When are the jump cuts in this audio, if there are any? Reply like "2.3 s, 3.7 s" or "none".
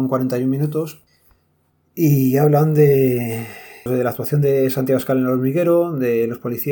3.9 s